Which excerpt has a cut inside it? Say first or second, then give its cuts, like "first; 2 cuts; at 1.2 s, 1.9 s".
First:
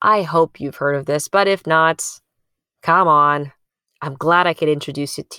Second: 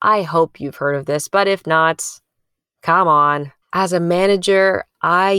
second; 1 cut; at 3.6 s